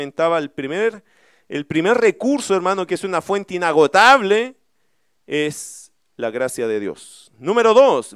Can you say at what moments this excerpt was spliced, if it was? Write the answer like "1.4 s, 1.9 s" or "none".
2.9 s